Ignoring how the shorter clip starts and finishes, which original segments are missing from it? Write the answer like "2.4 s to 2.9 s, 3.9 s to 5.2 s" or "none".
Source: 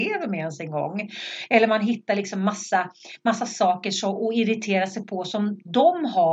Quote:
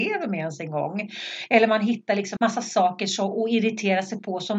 2.4 s to 3.2 s